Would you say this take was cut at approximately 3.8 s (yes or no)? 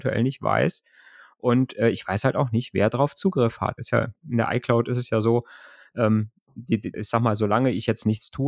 yes